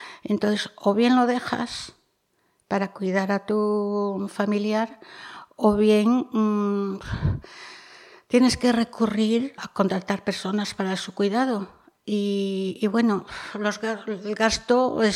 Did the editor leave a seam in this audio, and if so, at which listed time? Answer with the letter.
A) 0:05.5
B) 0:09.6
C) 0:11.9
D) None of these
B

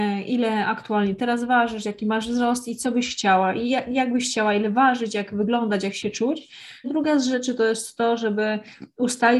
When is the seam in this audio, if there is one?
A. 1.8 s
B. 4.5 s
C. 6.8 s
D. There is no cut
C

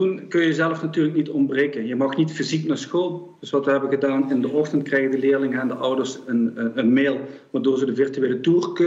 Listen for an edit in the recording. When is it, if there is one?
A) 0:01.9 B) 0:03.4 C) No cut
C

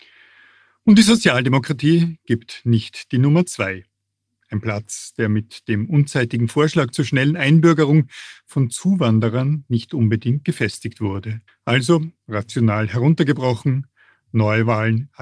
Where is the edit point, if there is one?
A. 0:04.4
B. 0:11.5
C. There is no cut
B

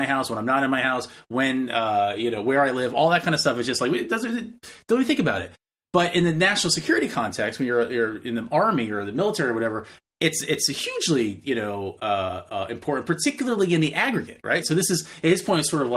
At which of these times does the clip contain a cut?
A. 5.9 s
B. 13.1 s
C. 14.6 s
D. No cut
C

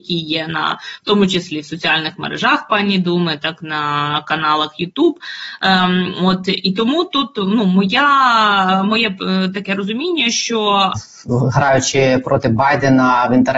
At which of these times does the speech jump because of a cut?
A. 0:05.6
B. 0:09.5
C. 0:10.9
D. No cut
C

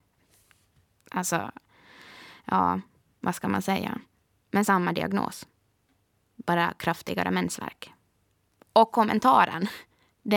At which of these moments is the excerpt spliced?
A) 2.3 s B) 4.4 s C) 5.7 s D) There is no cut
B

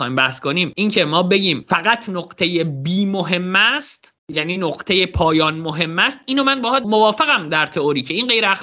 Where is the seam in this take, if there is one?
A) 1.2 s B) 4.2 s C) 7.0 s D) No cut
B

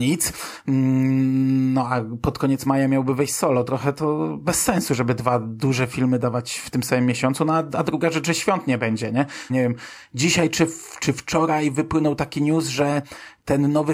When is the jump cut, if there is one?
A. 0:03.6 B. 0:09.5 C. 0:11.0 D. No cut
B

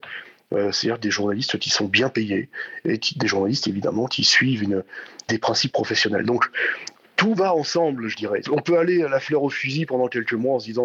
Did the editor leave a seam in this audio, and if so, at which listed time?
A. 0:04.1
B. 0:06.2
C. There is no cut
A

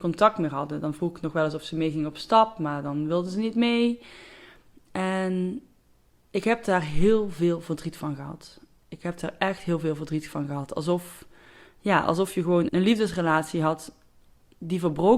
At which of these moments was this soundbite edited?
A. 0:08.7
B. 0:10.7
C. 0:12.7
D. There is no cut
C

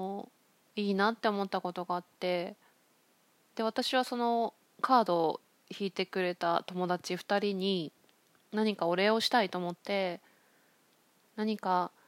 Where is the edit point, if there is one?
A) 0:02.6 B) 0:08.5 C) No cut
C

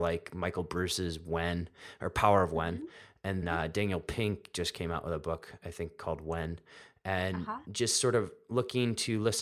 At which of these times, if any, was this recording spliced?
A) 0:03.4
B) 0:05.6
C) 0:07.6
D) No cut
A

